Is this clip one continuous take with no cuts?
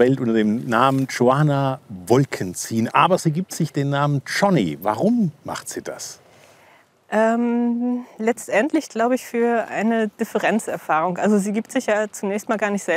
yes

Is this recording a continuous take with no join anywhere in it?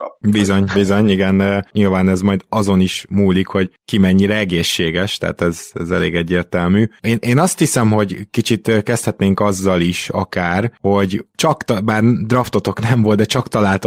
no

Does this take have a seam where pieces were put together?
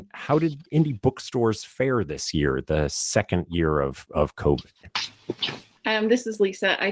no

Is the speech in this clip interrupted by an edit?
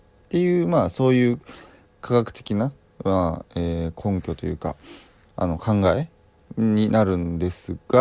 no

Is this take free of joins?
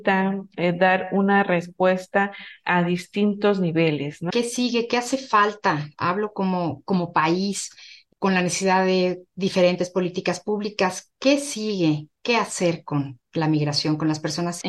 no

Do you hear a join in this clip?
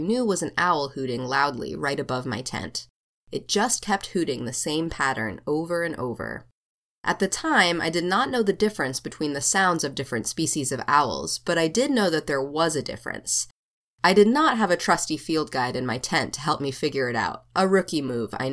no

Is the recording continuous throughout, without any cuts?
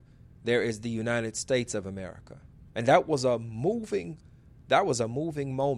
no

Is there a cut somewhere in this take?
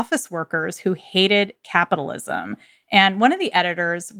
no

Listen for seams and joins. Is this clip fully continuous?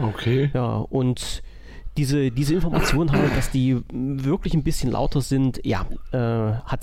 yes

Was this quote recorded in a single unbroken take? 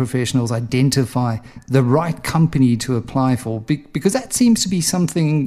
yes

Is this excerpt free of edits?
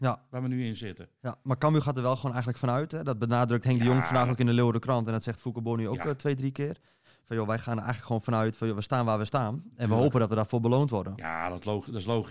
yes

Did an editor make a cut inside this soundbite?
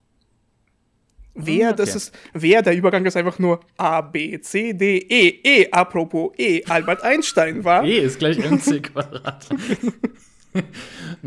no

